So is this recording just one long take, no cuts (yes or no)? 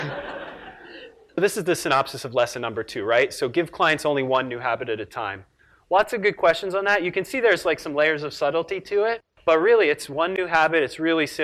yes